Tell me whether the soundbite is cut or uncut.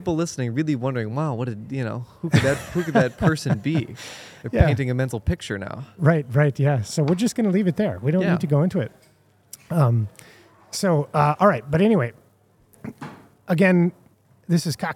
uncut